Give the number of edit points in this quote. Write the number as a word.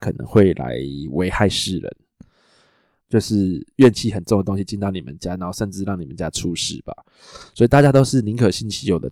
one